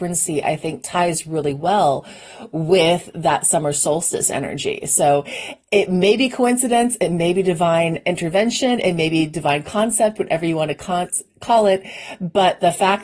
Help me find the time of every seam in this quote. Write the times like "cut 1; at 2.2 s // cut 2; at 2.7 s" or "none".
none